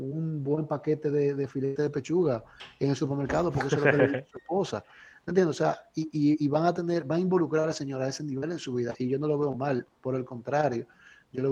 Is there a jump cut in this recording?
no; 0 cuts

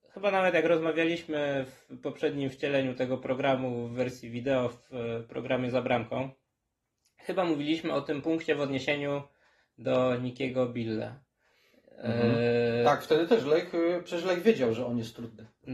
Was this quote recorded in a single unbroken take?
yes; 0 cuts

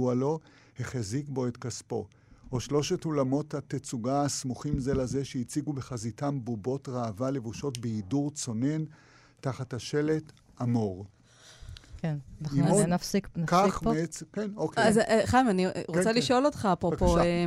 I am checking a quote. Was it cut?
no; 0 cuts

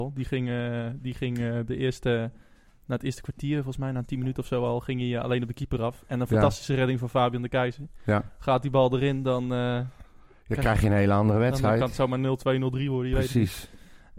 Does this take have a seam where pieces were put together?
no; 0 cuts

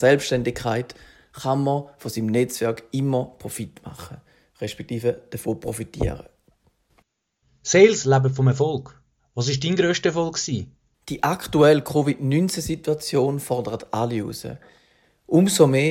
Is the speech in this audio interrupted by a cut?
yes; 1 cut; at 10.9 s

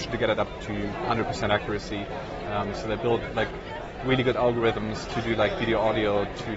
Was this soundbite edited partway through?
yes; 1 cut; at 2.4 s

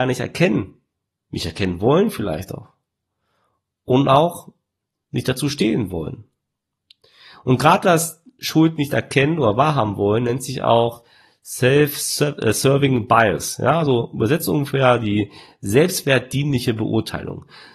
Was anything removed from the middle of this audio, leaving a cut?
no; 0 cuts

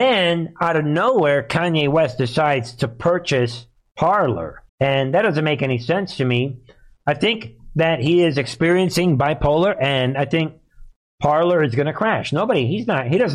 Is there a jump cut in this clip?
yes; 1 cut; at 4.7 s

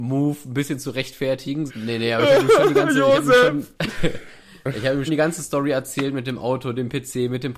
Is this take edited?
yes; 3 cuts; at 1.7 s, 3.7 s, 5.1 s

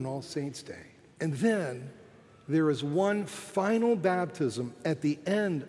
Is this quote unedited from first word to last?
no; 1 cut; at 1.2 s

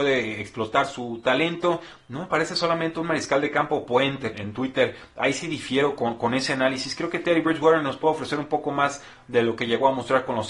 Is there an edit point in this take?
yes; 1 cut; at 4.3 s

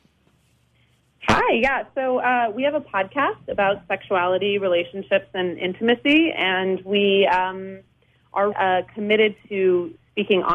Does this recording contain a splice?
yes; 1 cut; at 8.5 s

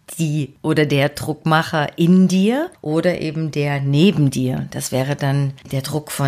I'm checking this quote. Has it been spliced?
no; 0 cuts

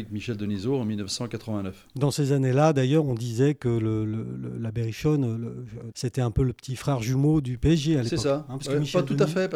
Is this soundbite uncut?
no; 2 cuts; at 3.0 s, 5.9 s

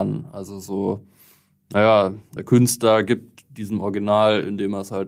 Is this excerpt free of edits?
no; 1 cut; at 2.4 s

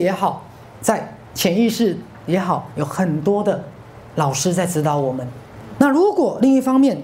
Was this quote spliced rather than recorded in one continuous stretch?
yes; 1 cut; at 5.8 s

